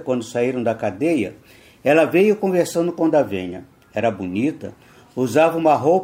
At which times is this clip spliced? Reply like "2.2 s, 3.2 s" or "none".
none